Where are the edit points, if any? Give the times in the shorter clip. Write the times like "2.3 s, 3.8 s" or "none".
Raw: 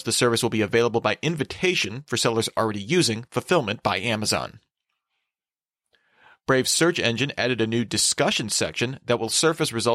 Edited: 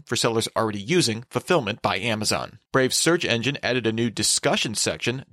2.6 s